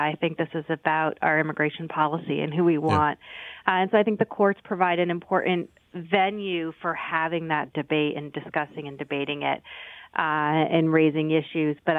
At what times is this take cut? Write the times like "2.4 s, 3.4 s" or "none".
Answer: none

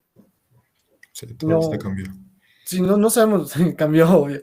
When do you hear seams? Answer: none

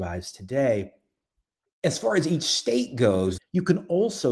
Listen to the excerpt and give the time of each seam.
3.4 s

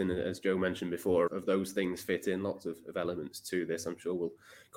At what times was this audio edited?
1.3 s

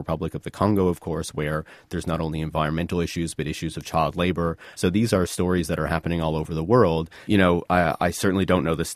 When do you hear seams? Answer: 4.7 s, 7.2 s

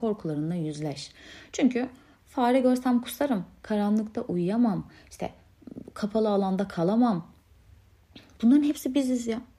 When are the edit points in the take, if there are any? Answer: none

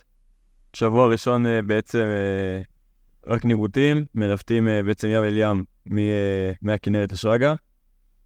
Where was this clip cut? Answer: none

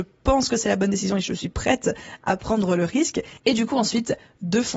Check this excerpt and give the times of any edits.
none

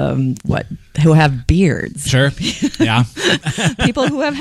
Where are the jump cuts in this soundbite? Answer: none

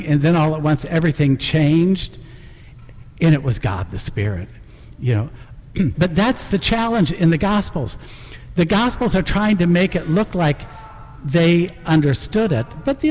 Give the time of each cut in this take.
5.9 s

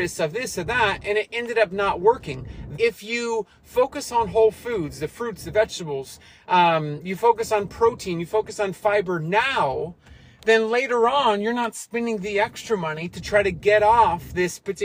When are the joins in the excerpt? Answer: 2.7 s

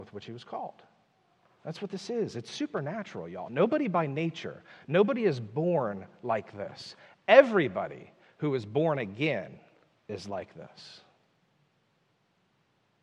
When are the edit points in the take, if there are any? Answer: none

